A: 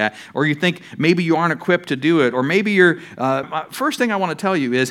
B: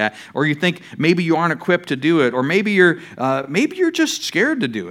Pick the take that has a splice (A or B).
A